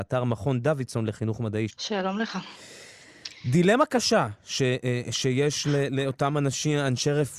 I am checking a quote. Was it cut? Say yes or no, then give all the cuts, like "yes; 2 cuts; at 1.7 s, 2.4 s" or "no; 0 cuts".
yes; 1 cut; at 1.7 s